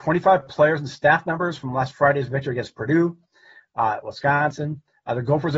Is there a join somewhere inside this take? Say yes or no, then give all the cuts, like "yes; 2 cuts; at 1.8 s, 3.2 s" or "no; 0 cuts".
no; 0 cuts